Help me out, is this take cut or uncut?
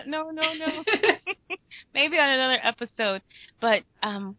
uncut